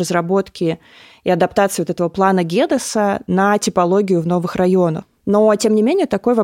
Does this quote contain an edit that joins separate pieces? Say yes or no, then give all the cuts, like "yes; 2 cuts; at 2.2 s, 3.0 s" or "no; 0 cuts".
no; 0 cuts